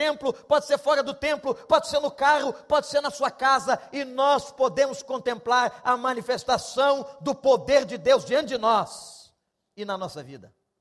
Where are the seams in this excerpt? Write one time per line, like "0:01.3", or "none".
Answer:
none